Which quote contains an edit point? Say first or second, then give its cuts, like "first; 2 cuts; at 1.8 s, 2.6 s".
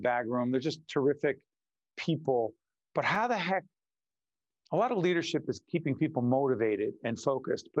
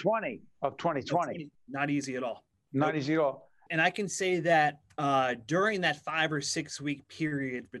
second; 2 cuts; at 1.5 s, 3.7 s